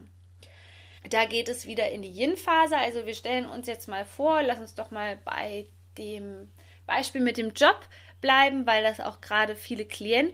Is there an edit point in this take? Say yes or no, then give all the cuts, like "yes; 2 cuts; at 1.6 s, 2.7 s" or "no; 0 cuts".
yes; 1 cut; at 1.0 s